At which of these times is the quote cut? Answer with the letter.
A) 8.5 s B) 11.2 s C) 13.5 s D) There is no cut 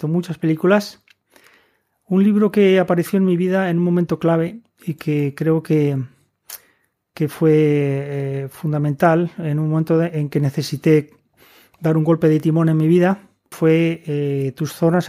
C